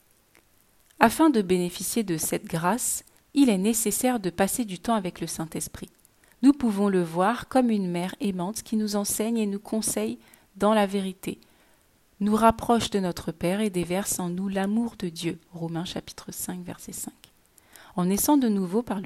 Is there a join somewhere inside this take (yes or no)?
no